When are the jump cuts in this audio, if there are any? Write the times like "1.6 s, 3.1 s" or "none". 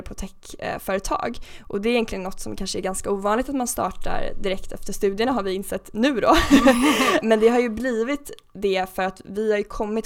7.2 s